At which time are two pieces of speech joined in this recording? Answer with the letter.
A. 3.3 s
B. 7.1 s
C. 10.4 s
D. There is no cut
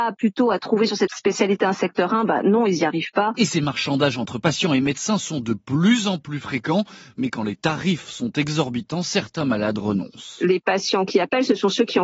A